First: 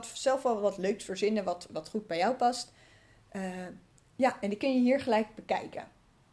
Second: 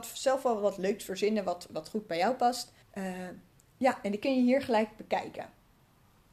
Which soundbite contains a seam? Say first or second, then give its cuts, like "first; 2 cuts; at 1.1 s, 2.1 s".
second; 1 cut; at 2.8 s